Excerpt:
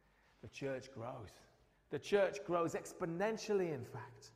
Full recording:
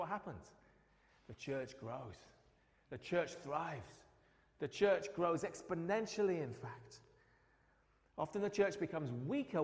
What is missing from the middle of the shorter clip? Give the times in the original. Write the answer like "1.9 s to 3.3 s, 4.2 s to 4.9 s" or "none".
2.6 s to 4.4 s